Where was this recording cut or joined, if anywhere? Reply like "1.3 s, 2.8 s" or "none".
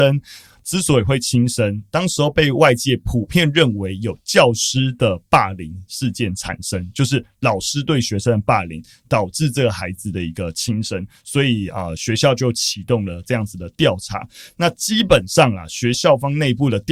15.9 s